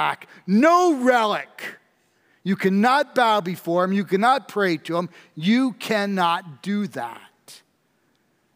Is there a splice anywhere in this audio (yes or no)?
no